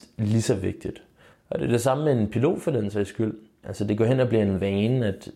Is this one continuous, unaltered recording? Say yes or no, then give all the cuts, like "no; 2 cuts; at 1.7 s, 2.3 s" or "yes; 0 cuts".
no; 2 cuts; at 1.3 s, 3.6 s